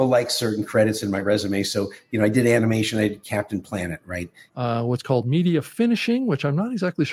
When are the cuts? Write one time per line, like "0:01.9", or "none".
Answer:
0:04.5